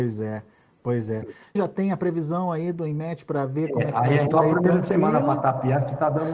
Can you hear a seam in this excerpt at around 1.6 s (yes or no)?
yes